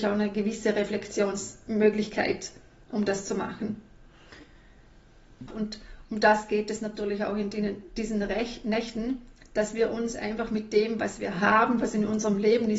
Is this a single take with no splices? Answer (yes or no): no